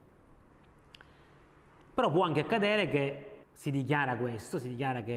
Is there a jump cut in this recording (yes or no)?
yes